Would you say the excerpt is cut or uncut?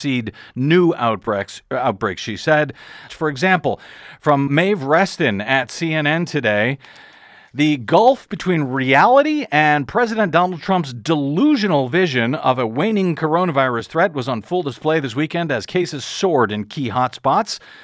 cut